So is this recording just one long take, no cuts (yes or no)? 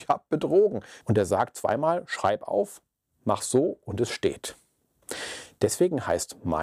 no